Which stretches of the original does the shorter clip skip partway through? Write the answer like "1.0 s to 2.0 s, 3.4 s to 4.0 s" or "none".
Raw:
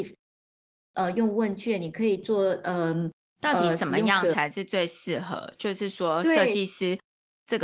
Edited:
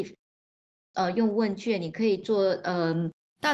none